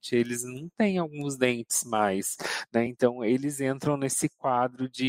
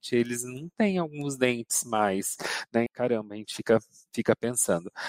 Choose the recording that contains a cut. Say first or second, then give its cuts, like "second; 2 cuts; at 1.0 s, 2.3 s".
second; 1 cut; at 2.9 s